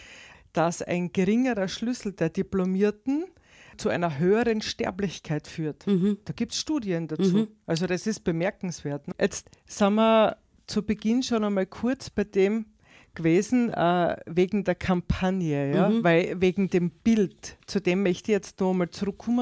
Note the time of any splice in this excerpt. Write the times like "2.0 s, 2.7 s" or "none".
9.1 s